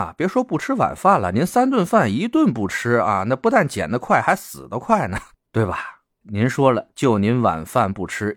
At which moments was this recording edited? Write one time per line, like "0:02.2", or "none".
0:06.2